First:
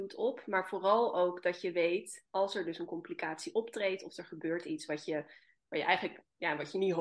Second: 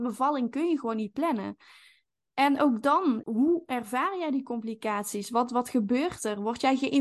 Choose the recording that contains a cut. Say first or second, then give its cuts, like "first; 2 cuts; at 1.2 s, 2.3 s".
second; 1 cut; at 3.2 s